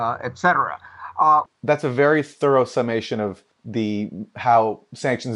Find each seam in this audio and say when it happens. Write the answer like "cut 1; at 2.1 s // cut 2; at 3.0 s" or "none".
cut 1; at 1.5 s // cut 2; at 3.5 s